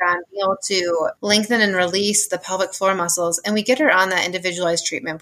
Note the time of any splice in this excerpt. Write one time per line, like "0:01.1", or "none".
0:01.2